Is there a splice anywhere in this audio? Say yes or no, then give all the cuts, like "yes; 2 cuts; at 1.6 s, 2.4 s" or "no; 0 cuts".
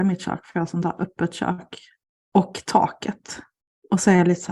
no; 0 cuts